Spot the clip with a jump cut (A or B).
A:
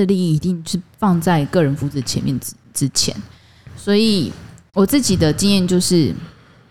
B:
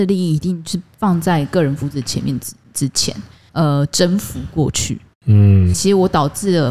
B